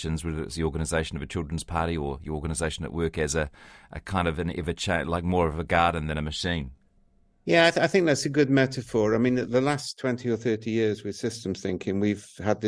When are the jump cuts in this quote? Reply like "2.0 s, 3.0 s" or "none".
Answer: none